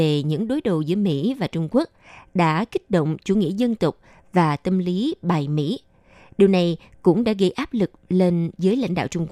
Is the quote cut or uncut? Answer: uncut